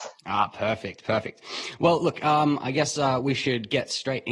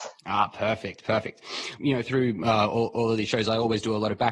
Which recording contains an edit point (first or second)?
second